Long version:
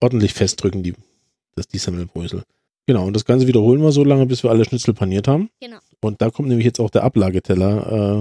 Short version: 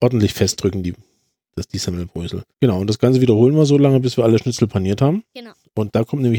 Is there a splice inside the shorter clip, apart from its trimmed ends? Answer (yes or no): yes